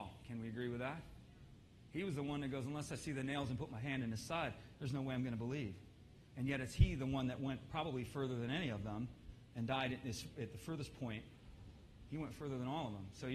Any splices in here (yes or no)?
no